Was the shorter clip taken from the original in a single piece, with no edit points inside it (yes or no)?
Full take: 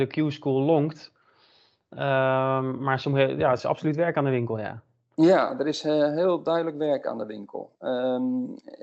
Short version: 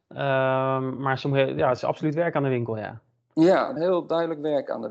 no